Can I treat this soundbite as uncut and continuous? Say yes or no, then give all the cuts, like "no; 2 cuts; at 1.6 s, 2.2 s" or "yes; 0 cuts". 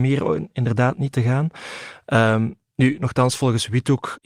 yes; 0 cuts